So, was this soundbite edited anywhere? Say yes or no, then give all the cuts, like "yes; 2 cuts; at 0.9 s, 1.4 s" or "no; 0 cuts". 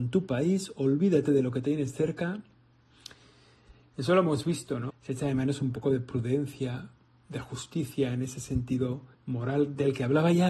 yes; 2 cuts; at 4.9 s, 9.1 s